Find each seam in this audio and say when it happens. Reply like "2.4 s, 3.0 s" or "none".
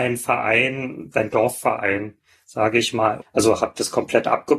3.2 s